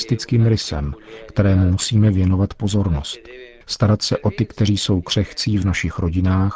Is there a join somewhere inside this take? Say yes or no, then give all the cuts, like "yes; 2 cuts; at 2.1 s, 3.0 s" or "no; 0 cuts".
yes; 1 cut; at 3.6 s